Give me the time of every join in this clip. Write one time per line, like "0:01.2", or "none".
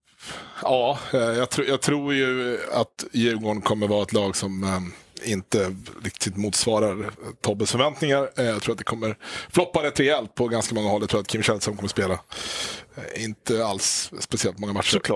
none